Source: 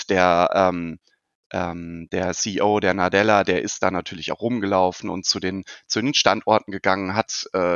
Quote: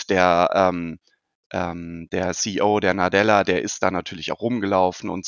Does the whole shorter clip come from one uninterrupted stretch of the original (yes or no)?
yes